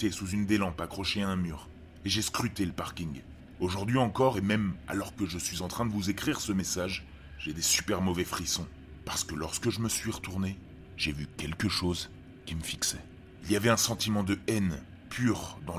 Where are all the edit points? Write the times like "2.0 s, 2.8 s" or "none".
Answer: none